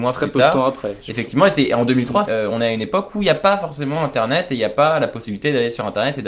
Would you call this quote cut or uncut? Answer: cut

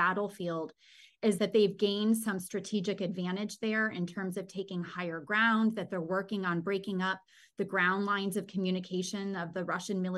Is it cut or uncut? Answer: uncut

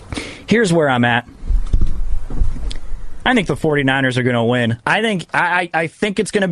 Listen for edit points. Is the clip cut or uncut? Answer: uncut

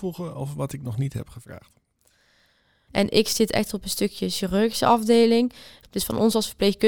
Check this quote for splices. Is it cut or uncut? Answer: cut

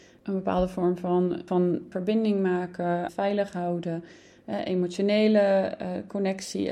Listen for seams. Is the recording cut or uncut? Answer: cut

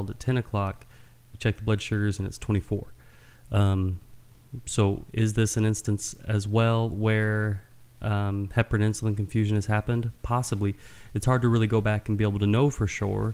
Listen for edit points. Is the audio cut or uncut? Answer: uncut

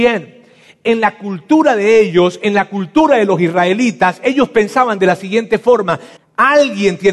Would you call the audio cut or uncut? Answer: cut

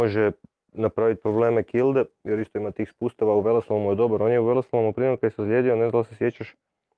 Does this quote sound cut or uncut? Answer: uncut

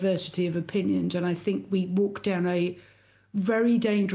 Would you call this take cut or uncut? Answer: uncut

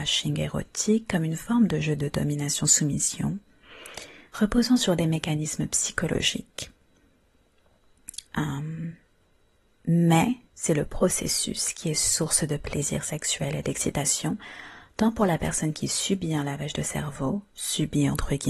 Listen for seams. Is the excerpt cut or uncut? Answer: cut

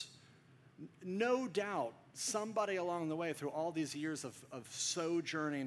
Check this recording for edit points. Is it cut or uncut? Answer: uncut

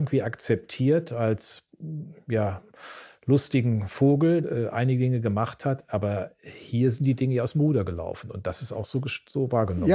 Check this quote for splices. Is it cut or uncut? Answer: cut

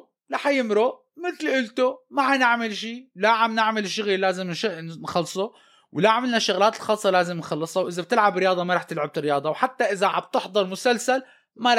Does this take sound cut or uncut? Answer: uncut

